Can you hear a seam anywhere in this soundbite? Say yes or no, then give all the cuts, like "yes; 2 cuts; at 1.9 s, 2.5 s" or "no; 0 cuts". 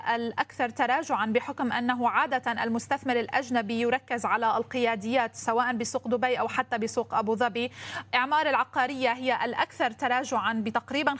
no; 0 cuts